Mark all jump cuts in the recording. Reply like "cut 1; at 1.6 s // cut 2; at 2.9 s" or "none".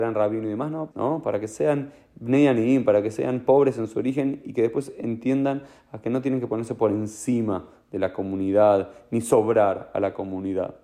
cut 1; at 0.9 s